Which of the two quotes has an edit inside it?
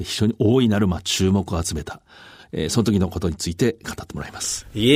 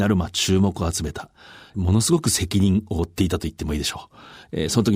first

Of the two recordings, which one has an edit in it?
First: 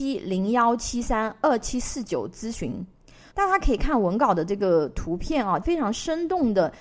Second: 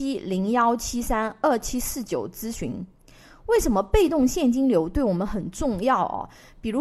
first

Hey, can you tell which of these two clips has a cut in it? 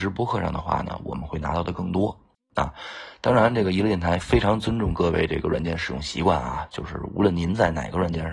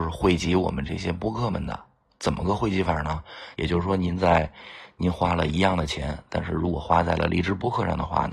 second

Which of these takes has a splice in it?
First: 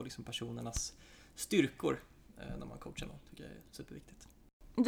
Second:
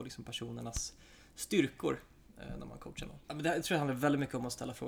second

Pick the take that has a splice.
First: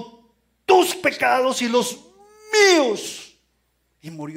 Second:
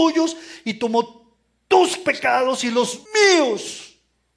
second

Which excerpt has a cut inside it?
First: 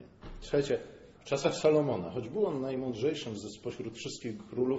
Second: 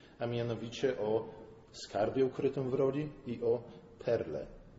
first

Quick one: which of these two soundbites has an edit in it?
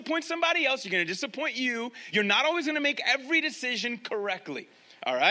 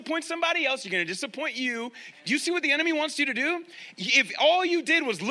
second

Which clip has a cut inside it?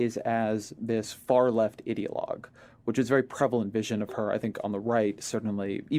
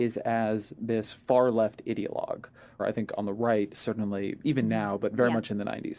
second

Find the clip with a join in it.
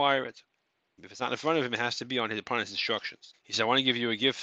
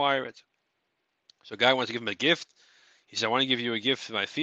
first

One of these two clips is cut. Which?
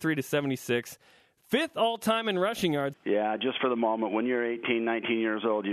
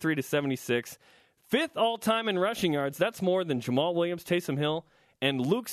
first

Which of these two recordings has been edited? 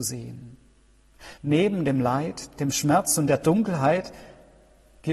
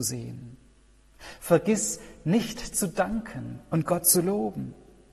first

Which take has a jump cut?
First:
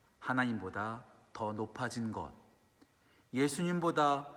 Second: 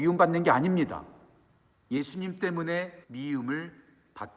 second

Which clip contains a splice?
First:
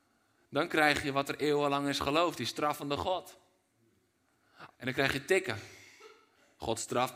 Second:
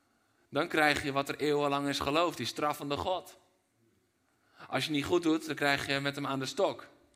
first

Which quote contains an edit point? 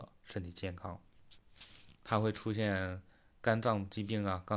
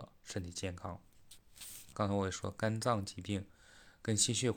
second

